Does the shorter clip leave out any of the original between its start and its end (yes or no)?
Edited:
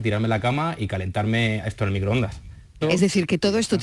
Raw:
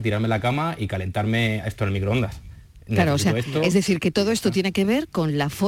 yes